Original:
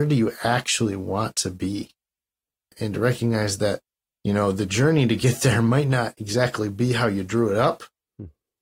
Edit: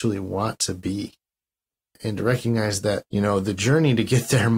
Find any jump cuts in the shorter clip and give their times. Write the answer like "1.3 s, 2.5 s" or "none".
3.1 s